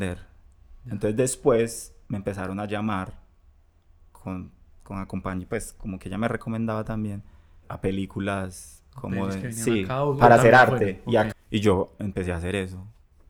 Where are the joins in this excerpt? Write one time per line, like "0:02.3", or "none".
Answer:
0:07.6
0:11.3